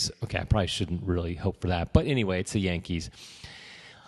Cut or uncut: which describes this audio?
uncut